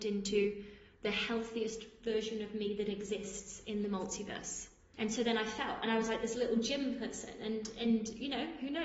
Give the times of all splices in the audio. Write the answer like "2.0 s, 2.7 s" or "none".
4.9 s